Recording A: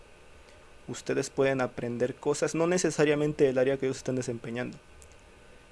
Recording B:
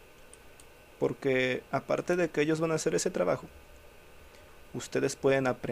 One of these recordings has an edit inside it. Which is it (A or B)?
B